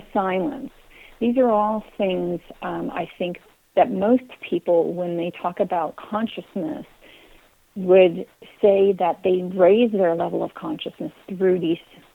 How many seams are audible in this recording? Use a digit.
0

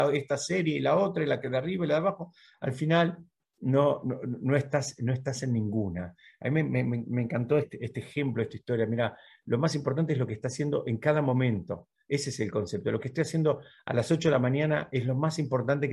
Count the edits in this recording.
1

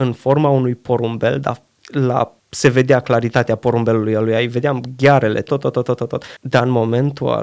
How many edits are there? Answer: 1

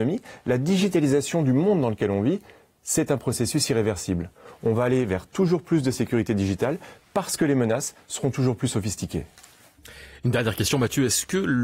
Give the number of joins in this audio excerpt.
0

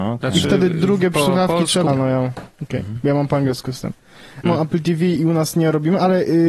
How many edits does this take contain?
2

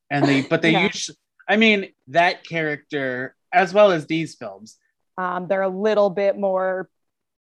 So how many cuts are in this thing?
2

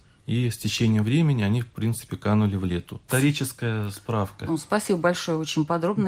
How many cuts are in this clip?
1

